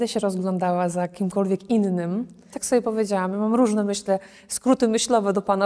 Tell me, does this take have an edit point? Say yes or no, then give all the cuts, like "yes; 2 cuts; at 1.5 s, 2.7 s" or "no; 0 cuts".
yes; 1 cut; at 2.5 s